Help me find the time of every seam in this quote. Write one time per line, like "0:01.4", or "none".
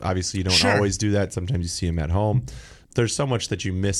0:02.8